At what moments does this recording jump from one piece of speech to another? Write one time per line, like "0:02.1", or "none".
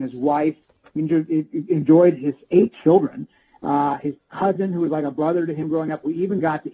none